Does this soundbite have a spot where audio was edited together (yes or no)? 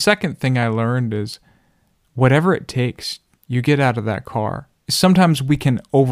no